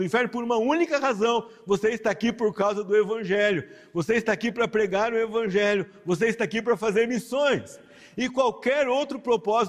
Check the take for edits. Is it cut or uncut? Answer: uncut